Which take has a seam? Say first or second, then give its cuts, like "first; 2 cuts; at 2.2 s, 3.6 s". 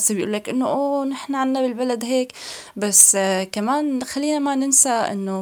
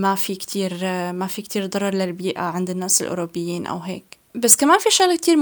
second; 1 cut; at 4.3 s